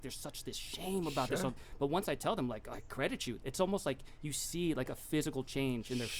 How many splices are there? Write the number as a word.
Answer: zero